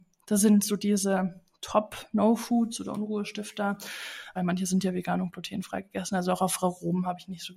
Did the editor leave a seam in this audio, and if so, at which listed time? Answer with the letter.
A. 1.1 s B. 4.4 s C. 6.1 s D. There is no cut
B